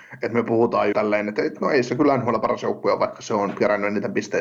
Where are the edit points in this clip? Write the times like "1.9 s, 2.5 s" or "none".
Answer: 0.9 s